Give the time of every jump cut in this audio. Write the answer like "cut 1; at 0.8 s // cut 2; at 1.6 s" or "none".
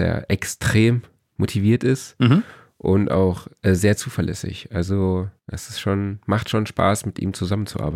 cut 1; at 5.4 s